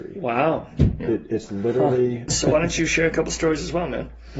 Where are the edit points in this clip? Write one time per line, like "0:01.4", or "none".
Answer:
0:02.3